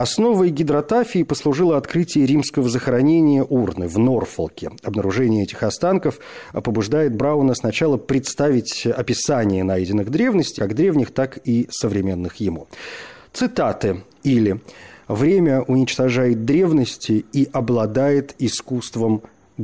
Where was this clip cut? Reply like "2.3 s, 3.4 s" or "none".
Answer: 10.6 s, 14.1 s